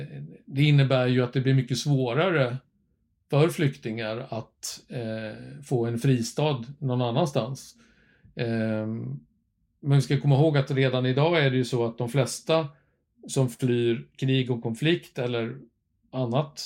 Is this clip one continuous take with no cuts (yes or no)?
yes